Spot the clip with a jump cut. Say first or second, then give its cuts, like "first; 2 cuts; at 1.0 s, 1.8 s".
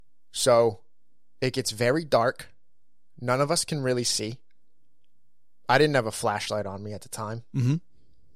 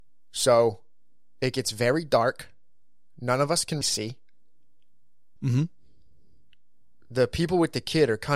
second; 2 cuts; at 3.8 s, 5.4 s